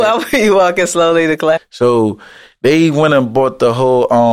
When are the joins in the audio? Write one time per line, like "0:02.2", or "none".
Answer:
0:01.6